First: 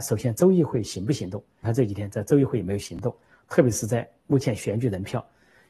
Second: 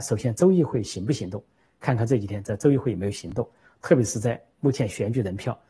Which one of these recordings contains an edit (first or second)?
first